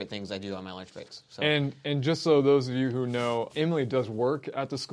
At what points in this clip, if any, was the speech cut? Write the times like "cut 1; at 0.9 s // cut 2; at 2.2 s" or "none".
cut 1; at 3.5 s